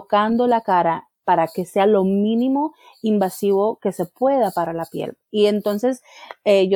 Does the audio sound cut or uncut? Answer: uncut